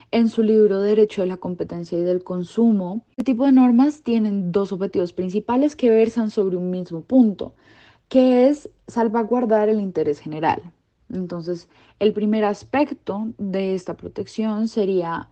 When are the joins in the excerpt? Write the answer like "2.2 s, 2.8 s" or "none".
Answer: none